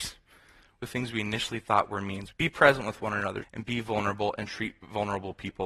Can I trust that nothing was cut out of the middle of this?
no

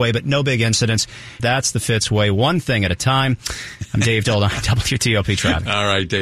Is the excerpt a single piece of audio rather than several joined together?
no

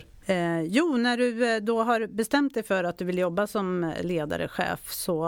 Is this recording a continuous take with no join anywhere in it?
yes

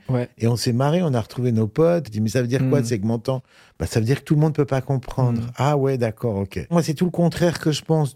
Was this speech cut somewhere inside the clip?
yes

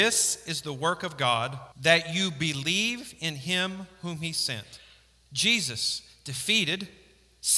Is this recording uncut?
no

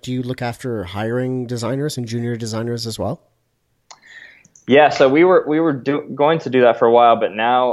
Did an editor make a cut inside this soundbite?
no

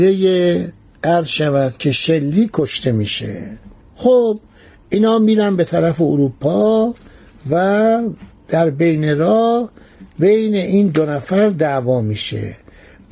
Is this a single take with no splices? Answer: yes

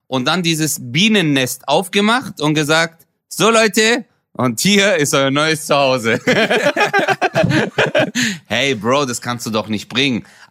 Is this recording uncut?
yes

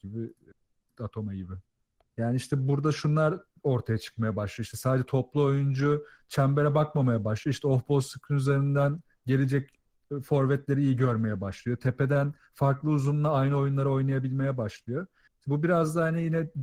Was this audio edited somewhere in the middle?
yes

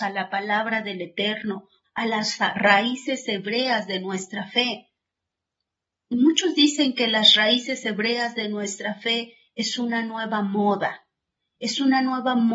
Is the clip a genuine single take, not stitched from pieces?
no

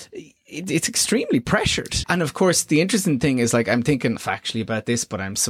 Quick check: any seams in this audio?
yes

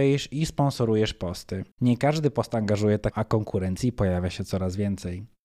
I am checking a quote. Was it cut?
yes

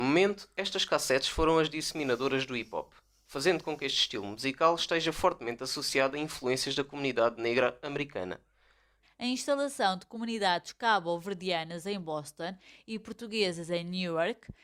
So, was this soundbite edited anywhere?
yes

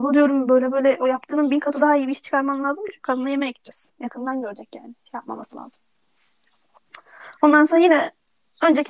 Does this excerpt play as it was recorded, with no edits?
yes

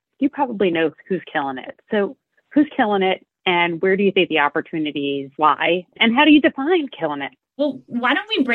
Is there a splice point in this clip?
yes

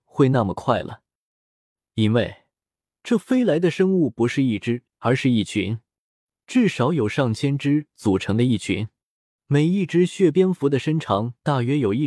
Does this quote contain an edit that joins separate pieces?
yes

